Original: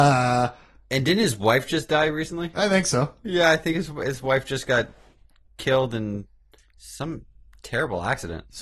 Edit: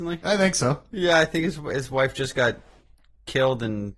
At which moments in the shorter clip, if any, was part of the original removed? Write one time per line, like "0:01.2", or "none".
none